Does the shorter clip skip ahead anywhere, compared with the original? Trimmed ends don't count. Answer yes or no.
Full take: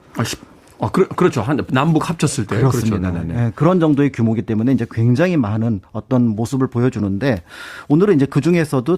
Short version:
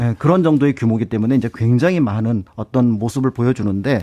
no